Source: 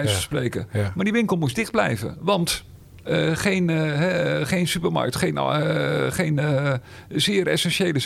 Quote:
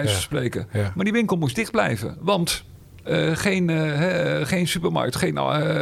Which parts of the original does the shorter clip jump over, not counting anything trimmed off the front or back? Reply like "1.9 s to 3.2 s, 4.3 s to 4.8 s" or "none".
none